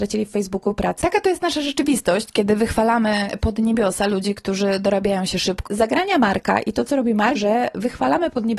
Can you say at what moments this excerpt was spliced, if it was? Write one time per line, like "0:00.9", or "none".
0:05.7
0:07.3